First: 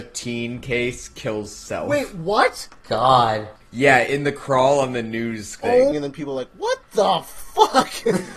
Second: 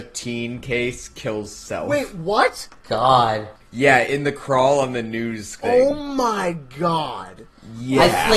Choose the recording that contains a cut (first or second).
first